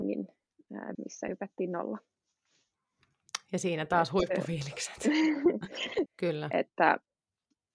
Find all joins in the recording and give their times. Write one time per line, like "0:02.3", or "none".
0:00.9
0:06.1

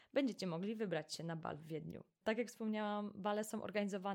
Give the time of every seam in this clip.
0:02.2

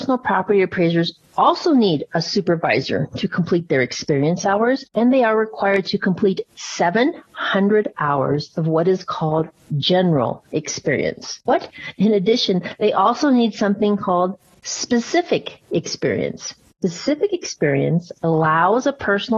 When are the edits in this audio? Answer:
none

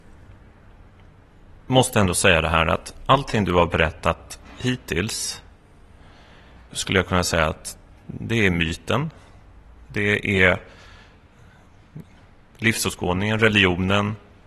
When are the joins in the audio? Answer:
0:06.7

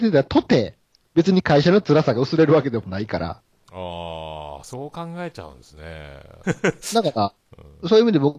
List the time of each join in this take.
0:01.0
0:06.4

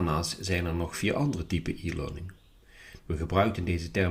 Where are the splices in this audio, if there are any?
0:03.0

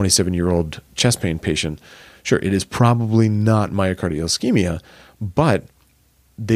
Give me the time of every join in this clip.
none

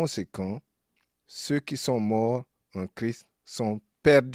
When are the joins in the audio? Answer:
0:01.1

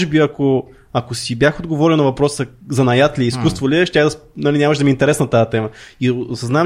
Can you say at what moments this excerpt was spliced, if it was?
none

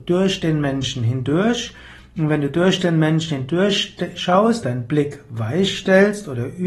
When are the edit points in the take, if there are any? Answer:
0:04.6

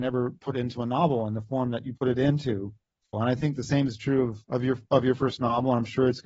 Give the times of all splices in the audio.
0:03.1
0:04.4

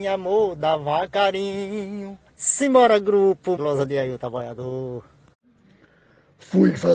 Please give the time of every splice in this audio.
0:02.3
0:03.6

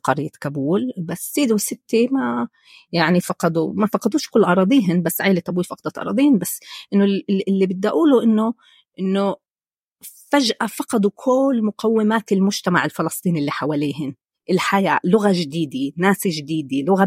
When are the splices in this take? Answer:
0:03.2

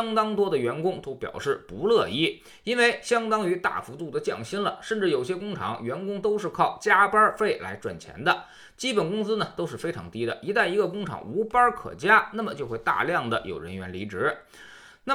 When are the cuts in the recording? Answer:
none

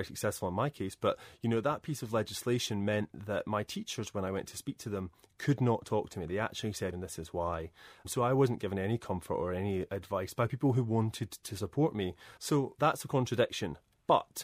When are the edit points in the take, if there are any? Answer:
0:06.9
0:12.4

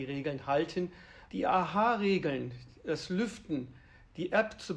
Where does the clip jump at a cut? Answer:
0:01.3

